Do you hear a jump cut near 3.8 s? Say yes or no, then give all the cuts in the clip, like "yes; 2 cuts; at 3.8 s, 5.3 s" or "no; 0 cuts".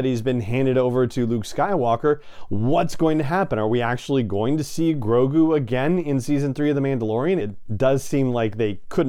no; 1 cut; at 7.4 s